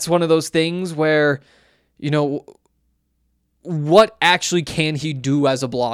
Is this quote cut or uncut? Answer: uncut